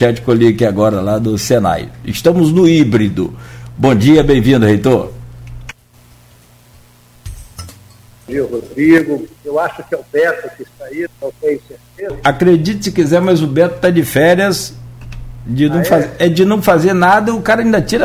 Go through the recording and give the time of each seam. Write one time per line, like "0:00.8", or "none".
0:09.4
0:11.1